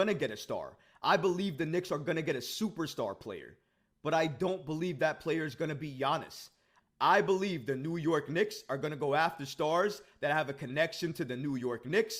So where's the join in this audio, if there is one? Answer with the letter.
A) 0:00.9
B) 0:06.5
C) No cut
C